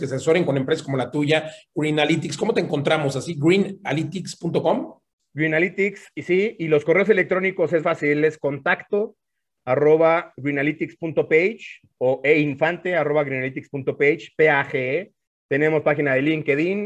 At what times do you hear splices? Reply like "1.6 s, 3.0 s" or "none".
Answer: 7.8 s